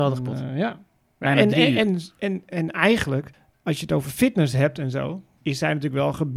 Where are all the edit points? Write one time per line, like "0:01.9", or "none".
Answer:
none